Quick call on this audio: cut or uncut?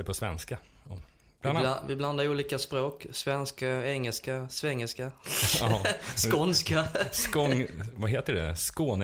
uncut